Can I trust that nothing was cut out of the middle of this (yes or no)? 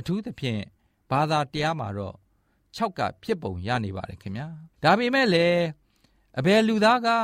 no